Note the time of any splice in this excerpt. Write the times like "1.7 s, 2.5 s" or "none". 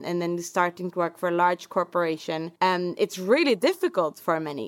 2.6 s